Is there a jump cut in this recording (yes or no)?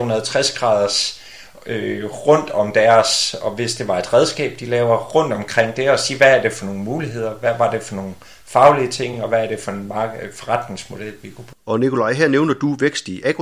no